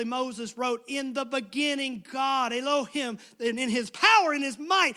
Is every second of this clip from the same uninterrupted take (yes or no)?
yes